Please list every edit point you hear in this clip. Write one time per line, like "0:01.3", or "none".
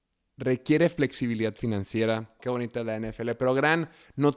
0:02.4